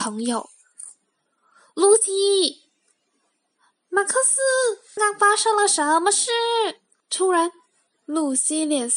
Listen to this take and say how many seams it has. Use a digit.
2